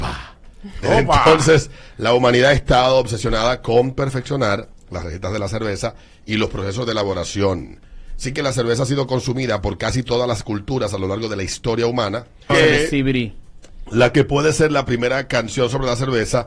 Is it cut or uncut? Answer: cut